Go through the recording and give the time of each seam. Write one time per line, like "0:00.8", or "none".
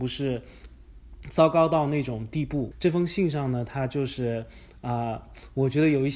0:02.7

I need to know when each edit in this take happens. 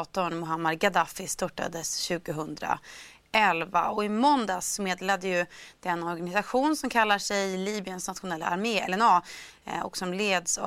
none

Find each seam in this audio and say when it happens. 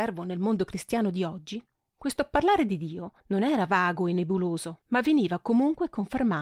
0:03.2
0:04.8

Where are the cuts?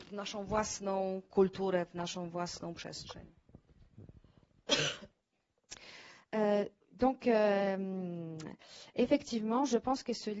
none

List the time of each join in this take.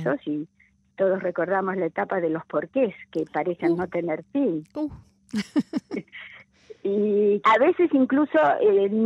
0:07.4

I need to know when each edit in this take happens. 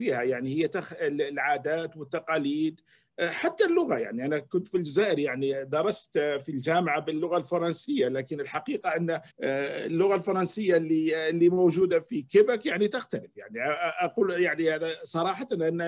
0:09.3

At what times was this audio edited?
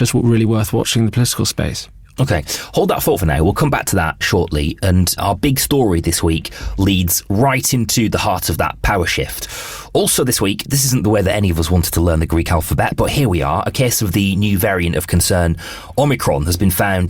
none

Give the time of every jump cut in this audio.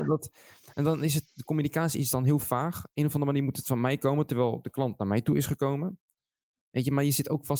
none

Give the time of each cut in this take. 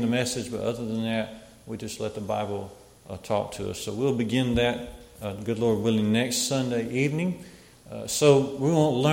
none

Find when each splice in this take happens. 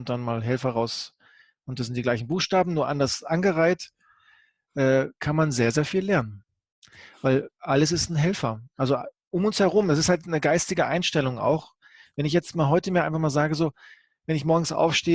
none

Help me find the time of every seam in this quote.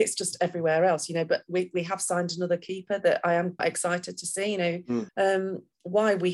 0:03.6
0:05.1

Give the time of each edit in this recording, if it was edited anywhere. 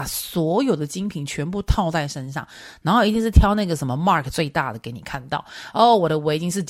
none

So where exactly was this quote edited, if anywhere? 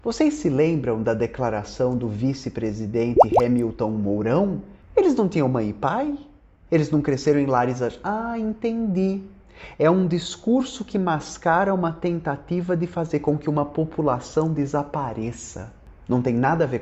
0:04.8

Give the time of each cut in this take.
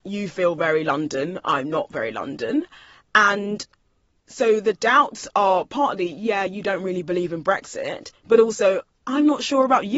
none

